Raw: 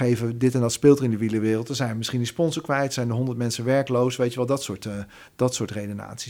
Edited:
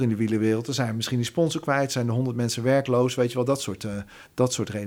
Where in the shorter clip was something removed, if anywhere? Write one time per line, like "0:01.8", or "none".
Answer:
none